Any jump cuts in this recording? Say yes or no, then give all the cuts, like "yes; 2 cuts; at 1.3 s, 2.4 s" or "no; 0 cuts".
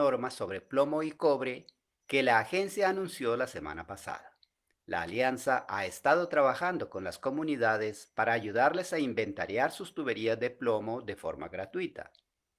yes; 1 cut; at 4.7 s